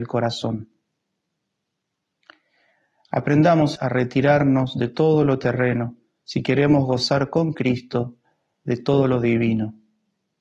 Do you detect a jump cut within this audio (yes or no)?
yes